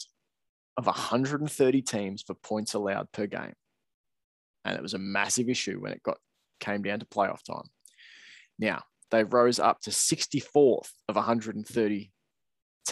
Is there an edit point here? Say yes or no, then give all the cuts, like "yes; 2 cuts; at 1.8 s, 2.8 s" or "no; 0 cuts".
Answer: yes; 2 cuts; at 9.0 s, 11.0 s